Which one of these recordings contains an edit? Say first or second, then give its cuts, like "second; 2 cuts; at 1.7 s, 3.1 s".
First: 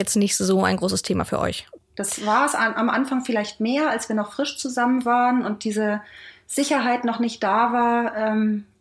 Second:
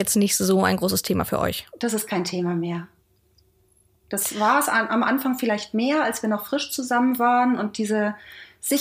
first; 1 cut; at 1.8 s